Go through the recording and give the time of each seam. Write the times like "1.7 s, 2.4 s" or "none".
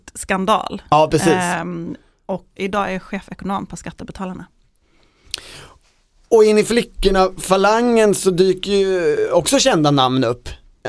2.6 s